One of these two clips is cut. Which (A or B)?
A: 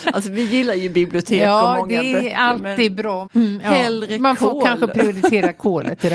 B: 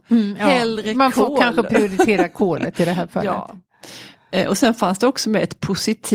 A